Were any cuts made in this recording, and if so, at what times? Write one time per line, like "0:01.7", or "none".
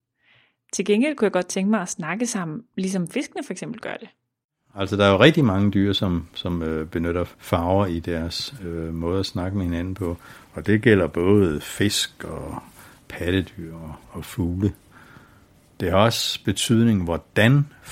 0:07.3